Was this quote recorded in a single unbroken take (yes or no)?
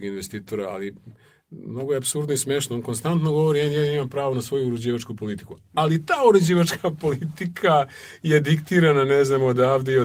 yes